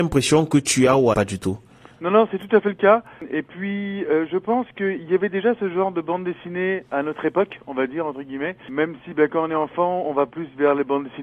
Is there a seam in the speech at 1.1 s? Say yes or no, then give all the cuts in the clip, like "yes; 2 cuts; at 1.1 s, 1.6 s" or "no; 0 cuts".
yes; 1 cut; at 1.1 s